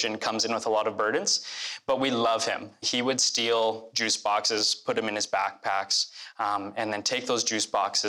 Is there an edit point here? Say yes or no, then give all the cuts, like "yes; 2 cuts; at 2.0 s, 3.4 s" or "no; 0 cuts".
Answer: yes; 1 cut; at 2.8 s